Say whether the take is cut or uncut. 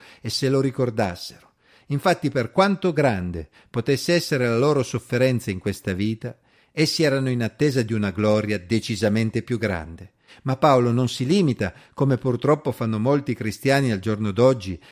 cut